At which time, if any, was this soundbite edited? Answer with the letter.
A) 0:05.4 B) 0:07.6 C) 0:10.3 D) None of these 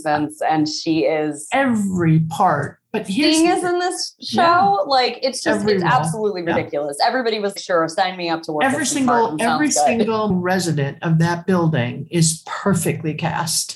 B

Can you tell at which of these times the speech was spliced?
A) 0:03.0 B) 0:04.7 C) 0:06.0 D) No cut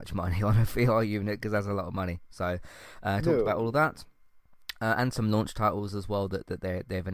D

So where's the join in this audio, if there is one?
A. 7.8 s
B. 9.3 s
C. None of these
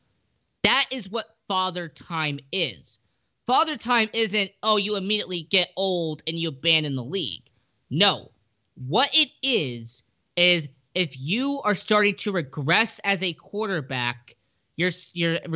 C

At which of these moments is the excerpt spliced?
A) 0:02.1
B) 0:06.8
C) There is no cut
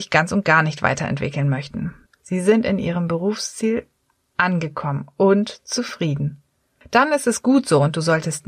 A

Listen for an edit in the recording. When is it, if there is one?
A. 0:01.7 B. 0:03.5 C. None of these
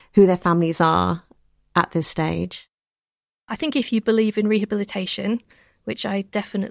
B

